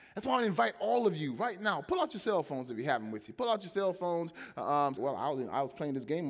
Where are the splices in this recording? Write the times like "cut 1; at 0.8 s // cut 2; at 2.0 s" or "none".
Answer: cut 1; at 5.0 s